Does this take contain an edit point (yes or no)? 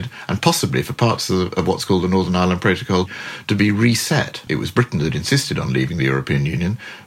yes